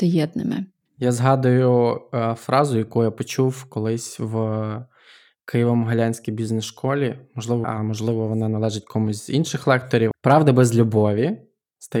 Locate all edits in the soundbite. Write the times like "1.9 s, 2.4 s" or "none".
7.6 s, 10.1 s